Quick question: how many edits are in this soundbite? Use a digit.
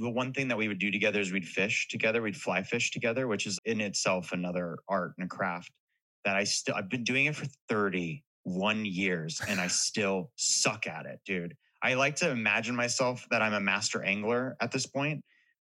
1